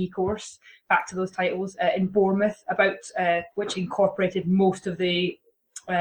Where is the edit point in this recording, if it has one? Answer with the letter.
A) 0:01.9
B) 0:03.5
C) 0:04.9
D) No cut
B